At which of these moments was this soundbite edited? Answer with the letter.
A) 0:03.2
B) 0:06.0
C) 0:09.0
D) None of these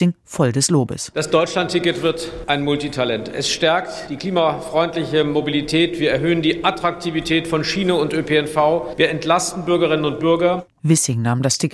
D